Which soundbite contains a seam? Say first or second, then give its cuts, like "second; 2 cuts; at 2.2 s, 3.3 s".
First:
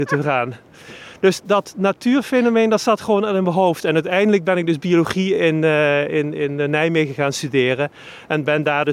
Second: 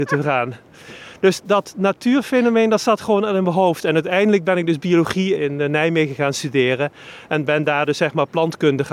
second; 1 cut; at 5.4 s